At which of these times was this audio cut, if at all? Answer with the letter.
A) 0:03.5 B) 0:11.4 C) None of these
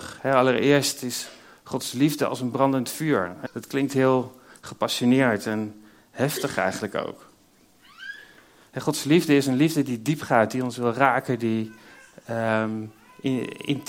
A